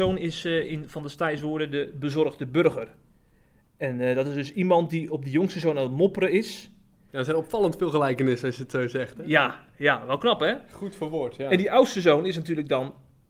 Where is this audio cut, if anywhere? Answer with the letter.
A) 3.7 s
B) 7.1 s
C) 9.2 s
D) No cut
B